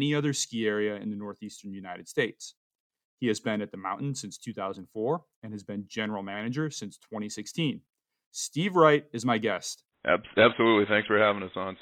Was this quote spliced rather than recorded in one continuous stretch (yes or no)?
yes